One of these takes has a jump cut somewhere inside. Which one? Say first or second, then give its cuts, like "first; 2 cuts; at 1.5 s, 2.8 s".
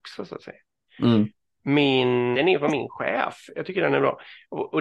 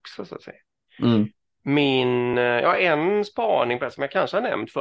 first; 1 cut; at 2.3 s